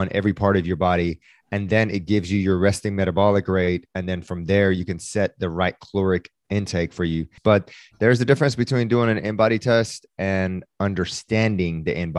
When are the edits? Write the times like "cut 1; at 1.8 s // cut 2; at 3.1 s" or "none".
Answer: cut 1; at 7.4 s